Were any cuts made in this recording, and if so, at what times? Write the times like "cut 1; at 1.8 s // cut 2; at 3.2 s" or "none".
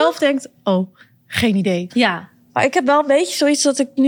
cut 1; at 1.9 s